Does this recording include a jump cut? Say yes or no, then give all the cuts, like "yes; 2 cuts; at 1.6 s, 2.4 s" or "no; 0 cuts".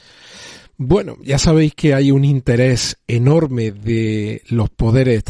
no; 0 cuts